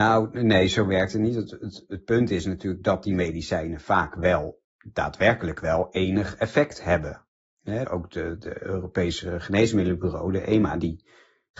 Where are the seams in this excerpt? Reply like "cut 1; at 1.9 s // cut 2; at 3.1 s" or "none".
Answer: none